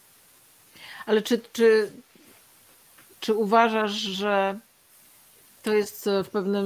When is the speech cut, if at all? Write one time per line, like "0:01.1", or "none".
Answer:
none

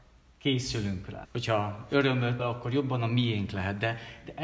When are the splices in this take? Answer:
0:01.2
0:02.4

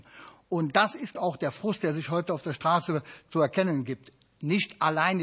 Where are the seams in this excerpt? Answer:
0:01.2

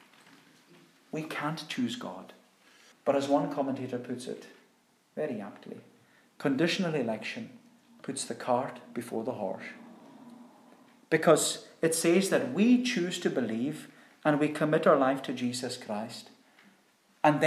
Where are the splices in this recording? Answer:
0:02.9

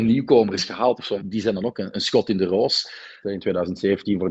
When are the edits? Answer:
0:01.2
0:03.2

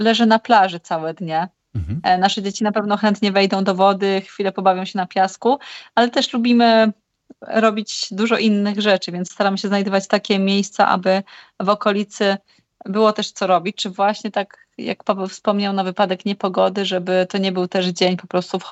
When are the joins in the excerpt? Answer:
none

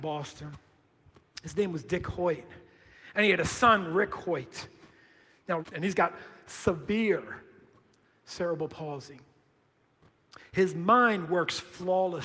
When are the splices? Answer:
0:05.6

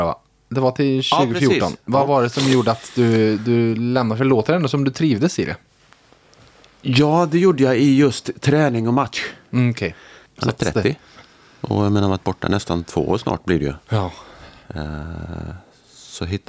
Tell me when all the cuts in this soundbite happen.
0:10.3

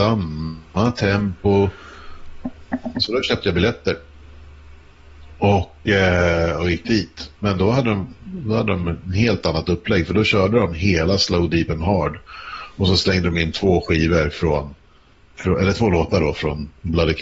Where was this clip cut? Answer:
0:02.9

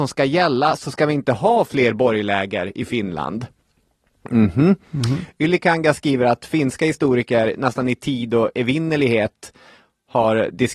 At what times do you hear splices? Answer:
none

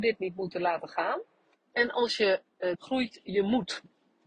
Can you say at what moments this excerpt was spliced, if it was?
0:01.5
0:02.7

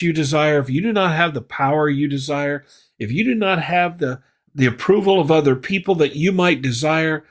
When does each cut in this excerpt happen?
none

